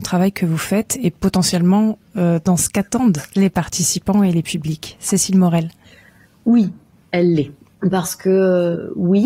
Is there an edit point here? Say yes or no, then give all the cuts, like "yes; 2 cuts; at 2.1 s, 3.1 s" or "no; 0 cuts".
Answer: no; 0 cuts